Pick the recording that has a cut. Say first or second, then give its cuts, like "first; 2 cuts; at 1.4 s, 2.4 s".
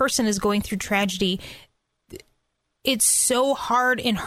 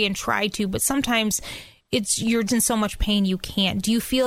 second; 1 cut; at 2.5 s